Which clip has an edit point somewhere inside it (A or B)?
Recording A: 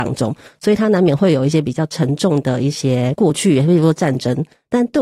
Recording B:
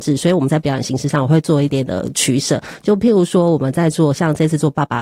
B